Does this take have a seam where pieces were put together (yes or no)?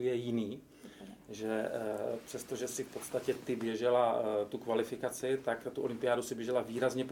no